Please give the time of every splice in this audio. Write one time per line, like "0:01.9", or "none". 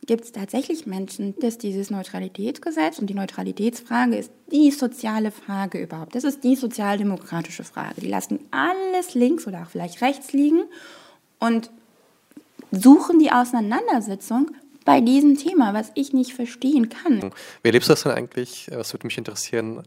0:01.4
0:17.2